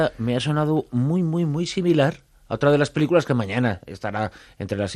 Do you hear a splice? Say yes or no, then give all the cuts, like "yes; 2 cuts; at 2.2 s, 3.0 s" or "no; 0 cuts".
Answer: no; 0 cuts